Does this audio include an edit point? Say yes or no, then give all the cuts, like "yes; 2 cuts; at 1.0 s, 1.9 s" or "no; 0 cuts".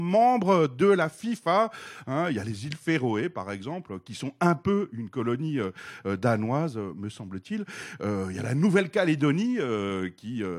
no; 0 cuts